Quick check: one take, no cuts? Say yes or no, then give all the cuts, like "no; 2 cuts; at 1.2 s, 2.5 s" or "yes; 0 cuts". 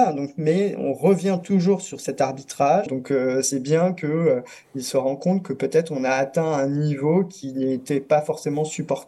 no; 1 cut; at 2.9 s